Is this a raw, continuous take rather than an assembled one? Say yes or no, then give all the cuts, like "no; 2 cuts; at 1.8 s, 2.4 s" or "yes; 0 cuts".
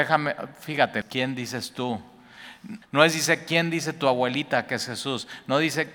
no; 2 cuts; at 1.0 s, 2.8 s